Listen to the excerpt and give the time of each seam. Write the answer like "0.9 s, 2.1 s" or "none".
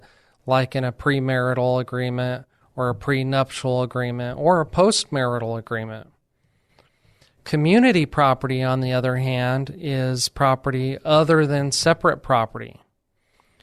none